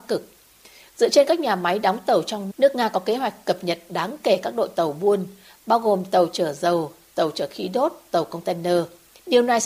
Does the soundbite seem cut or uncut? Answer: cut